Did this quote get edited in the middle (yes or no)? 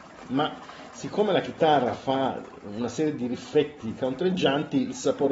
no